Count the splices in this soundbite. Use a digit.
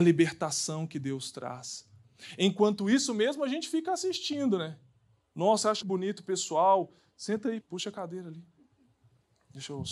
2